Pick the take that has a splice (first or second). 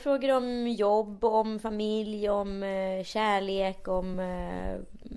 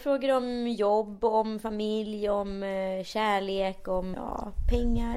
second